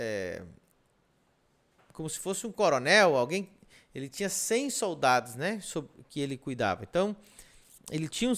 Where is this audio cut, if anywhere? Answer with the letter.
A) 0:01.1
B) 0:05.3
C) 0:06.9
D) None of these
D